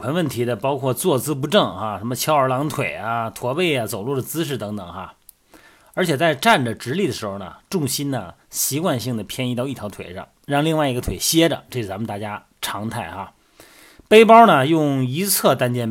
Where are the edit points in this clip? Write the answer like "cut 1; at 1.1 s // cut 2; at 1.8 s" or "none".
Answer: none